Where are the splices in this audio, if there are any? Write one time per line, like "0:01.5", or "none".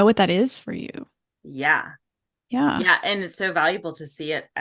none